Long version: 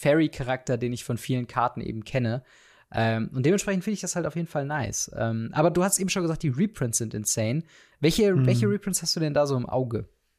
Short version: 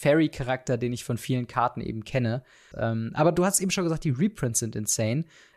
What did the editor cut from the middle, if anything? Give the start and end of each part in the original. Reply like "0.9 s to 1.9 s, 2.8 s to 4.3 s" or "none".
2.7 s to 5.1 s